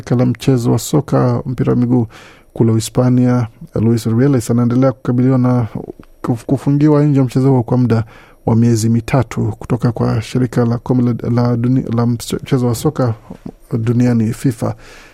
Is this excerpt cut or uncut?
cut